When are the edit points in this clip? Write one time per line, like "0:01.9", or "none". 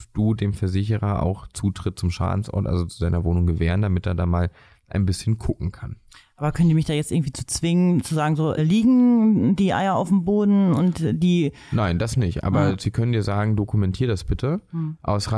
0:08.6